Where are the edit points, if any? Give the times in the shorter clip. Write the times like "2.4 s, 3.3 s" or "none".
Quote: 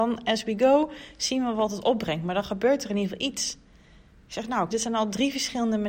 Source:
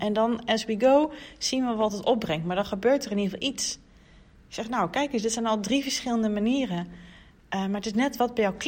4.7 s